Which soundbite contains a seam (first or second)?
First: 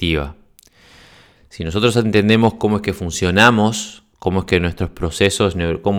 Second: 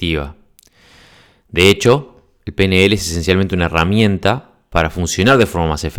first